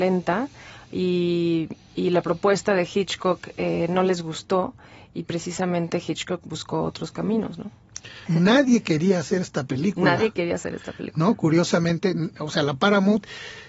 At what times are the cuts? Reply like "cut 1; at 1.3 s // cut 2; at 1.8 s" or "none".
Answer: cut 1; at 8.3 s